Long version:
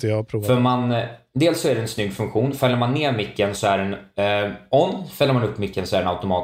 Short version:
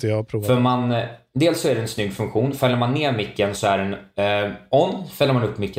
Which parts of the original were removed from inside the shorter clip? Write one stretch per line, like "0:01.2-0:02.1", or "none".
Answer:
none